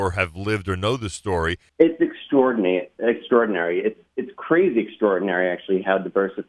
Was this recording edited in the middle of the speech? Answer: yes; 1 cut; at 1.7 s

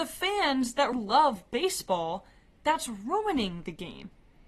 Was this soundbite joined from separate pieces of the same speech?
yes; 1 cut; at 0.9 s

